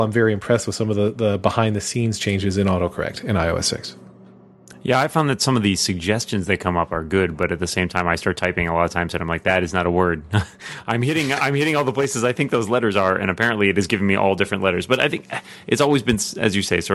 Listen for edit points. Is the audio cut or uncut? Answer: uncut